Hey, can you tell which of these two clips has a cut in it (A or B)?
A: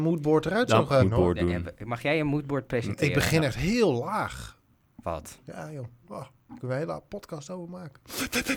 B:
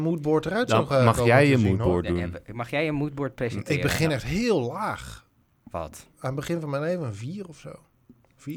A